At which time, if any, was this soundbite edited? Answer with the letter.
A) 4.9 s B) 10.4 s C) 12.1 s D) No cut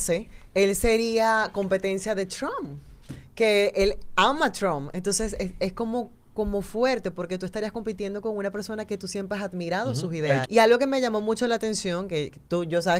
B